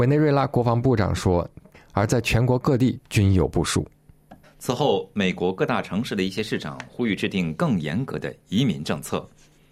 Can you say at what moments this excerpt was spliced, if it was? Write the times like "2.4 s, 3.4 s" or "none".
1.7 s, 4.4 s